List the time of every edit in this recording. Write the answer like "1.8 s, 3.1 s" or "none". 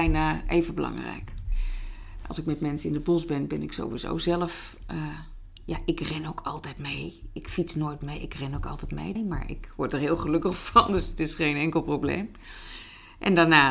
9.2 s